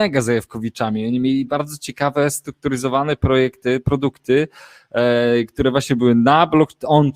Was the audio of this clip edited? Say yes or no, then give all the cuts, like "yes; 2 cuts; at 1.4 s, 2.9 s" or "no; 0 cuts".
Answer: no; 0 cuts